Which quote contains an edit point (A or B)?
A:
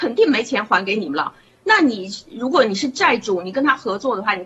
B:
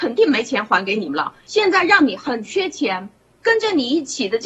B